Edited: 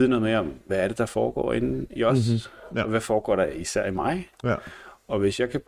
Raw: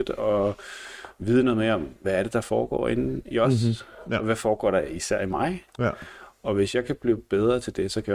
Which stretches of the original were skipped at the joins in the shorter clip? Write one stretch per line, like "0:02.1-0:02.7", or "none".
none